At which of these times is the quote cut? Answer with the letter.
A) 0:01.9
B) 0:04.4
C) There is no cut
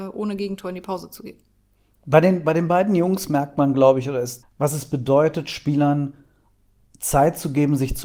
B